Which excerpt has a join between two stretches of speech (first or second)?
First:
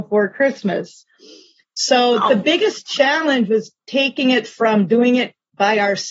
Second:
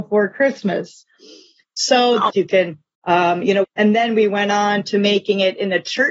second